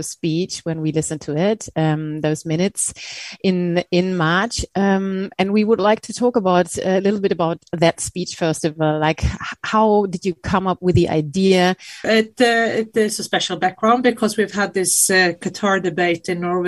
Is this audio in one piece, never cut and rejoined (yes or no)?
no